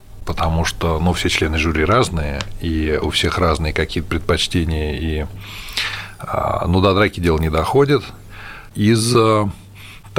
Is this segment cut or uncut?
uncut